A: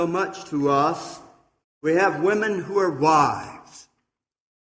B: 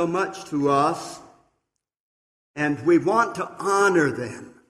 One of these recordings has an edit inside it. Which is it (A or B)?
A